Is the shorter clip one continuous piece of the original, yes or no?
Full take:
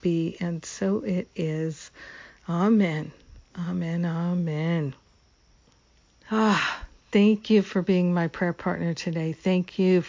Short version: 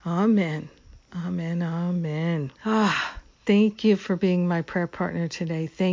no